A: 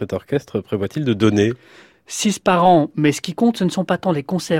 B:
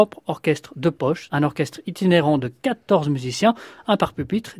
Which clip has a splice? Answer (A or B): B